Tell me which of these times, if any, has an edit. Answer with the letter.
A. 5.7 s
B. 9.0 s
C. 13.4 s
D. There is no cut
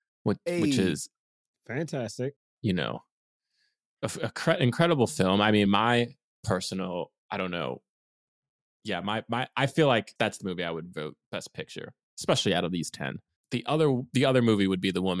D